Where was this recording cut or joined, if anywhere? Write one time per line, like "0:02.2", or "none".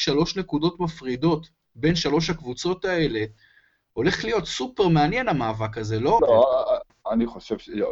0:06.2